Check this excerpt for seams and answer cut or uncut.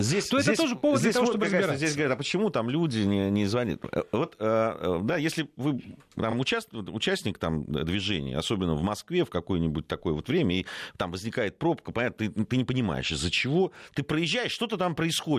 uncut